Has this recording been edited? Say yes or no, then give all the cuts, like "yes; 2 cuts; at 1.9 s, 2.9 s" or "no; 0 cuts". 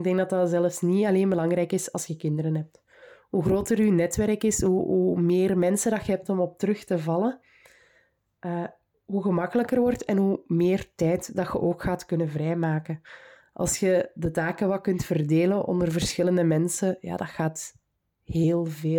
no; 0 cuts